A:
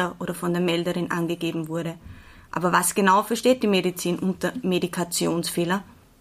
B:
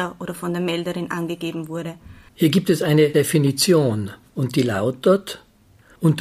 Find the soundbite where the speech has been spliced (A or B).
B